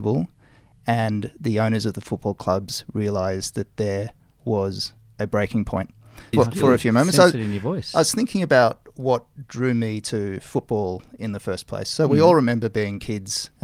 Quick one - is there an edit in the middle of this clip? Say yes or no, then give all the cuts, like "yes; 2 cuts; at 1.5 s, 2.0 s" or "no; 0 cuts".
yes; 1 cut; at 6.3 s